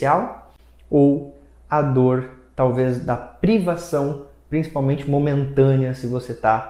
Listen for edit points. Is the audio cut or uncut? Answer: uncut